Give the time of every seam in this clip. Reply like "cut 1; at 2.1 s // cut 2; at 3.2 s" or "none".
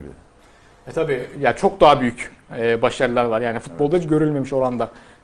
none